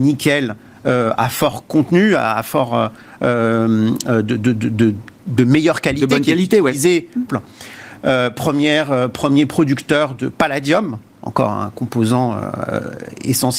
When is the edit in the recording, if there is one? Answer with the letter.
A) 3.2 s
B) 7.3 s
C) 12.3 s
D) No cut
B